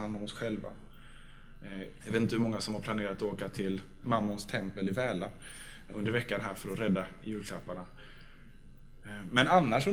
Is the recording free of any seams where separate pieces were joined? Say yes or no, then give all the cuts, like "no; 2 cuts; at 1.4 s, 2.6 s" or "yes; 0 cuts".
no; 2 cuts; at 2.0 s, 5.9 s